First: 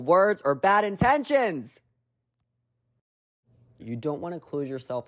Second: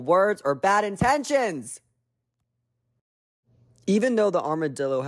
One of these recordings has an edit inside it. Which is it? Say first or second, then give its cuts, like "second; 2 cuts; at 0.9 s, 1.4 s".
first; 1 cut; at 3.8 s